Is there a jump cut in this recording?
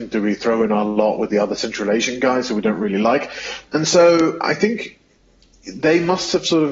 yes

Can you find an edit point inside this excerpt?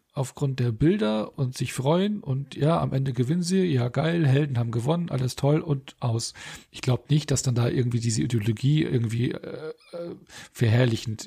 no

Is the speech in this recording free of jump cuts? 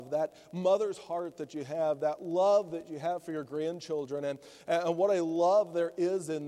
yes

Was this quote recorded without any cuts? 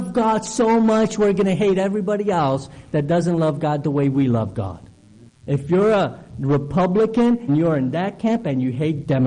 no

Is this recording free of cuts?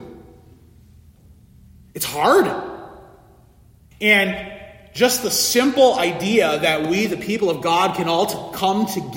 no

